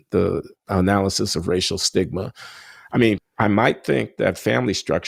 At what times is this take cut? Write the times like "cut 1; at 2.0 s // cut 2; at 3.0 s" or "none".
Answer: cut 1; at 3.2 s